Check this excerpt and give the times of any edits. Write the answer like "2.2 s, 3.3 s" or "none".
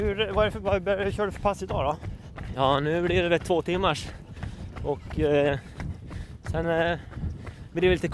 none

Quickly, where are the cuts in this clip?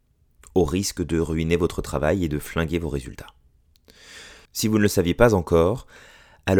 4.5 s

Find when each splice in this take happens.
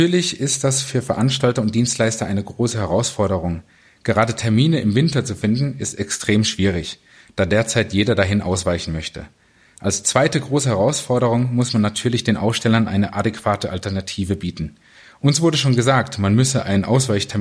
none

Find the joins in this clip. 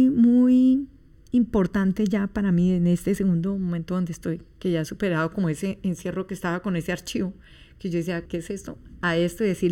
8.3 s

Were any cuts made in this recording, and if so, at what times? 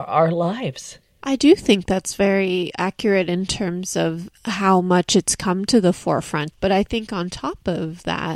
6.5 s

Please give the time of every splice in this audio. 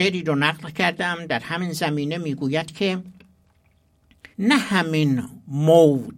4.3 s

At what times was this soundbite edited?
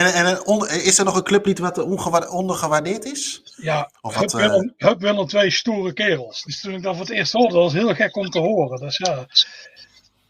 6.4 s

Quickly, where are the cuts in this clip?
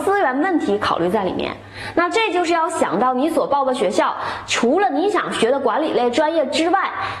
none

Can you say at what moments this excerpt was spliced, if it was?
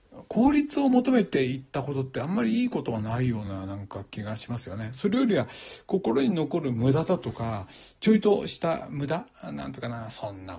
none

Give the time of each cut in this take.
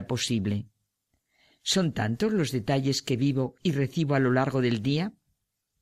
none

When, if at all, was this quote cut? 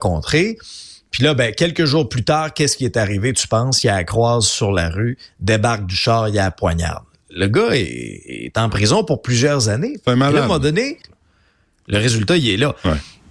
11.0 s

